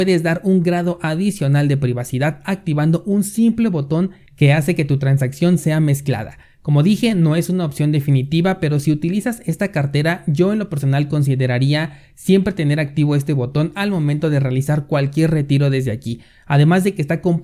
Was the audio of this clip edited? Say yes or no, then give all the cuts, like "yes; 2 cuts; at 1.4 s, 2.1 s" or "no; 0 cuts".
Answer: no; 0 cuts